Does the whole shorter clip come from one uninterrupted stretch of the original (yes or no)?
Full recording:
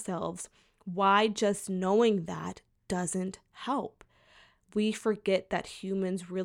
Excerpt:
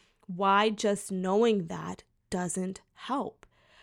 yes